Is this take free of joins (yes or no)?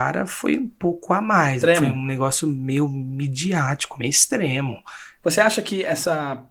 no